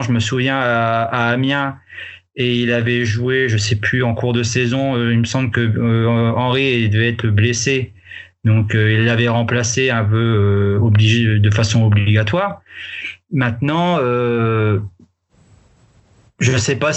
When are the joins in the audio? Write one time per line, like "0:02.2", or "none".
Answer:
none